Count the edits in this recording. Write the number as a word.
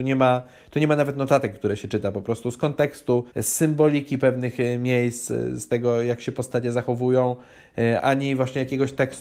two